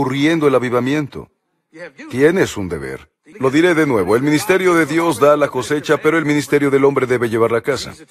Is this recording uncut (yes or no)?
no